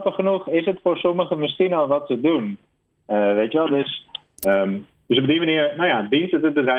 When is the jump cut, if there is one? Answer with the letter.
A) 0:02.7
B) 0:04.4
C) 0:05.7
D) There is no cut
B